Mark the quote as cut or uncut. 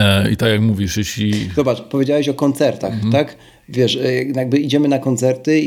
uncut